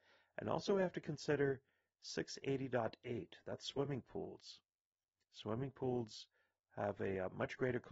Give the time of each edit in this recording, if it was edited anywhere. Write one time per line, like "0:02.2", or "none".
none